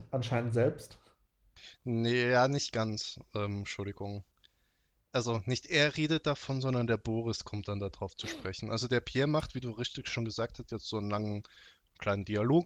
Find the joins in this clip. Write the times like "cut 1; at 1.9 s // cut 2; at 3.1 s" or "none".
none